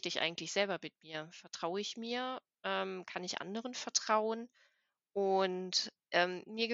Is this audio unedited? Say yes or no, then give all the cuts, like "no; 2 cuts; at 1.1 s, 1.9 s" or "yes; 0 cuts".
yes; 0 cuts